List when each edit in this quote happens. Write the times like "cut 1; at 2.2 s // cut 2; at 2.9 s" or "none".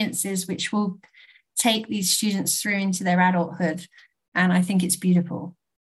none